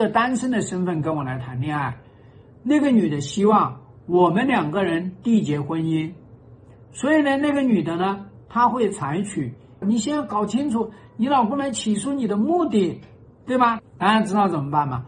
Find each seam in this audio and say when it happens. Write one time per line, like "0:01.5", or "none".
0:09.8
0:13.8